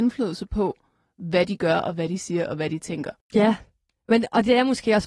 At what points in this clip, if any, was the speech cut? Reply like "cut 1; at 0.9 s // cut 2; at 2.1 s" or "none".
cut 1; at 3.2 s